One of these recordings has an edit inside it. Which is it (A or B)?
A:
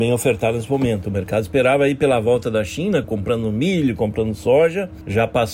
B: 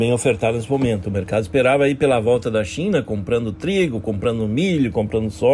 A